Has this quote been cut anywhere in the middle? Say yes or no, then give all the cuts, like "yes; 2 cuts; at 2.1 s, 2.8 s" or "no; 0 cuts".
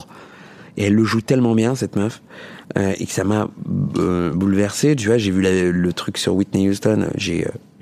no; 0 cuts